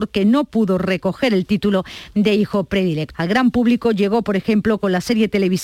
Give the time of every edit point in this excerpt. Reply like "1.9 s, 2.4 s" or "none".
3.1 s